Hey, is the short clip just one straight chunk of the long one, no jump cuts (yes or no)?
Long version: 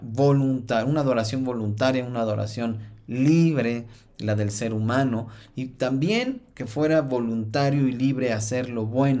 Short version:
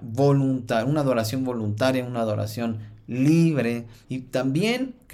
no